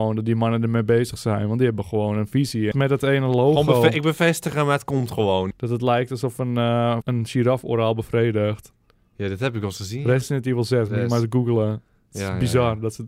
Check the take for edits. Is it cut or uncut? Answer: cut